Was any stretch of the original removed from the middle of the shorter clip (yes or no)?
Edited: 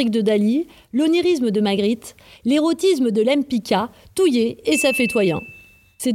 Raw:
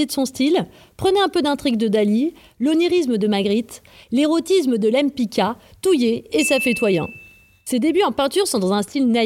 no